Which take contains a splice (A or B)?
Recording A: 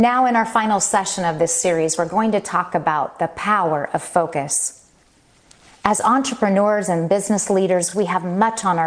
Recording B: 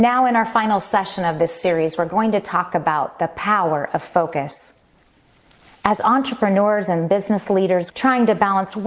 B